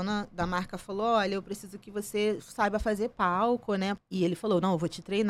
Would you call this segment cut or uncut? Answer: cut